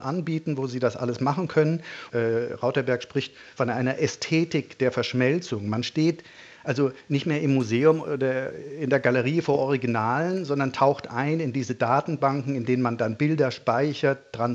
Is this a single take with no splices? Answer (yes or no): no